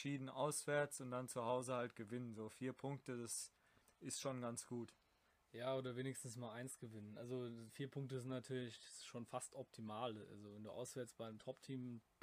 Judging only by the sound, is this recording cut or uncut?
uncut